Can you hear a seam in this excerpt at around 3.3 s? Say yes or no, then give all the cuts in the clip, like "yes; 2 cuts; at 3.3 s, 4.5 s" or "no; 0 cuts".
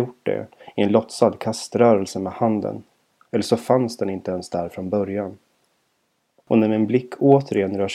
yes; 1 cut; at 3.3 s